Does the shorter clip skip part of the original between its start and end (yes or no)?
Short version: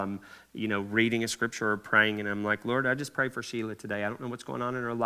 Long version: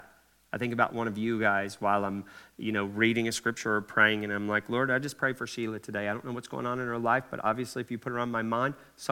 no